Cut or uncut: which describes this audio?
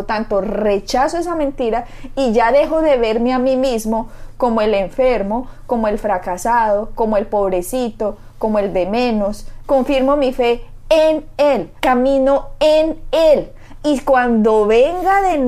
cut